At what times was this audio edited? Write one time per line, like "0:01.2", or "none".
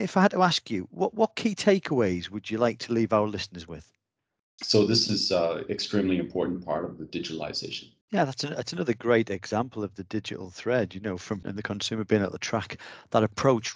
0:04.6
0:08.0
0:11.4